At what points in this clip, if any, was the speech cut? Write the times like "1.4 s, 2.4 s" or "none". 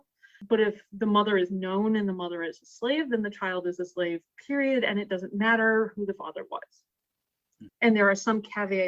7.7 s